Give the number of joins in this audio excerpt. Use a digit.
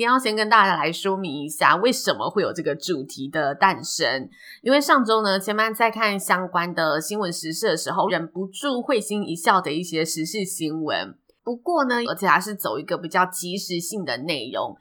2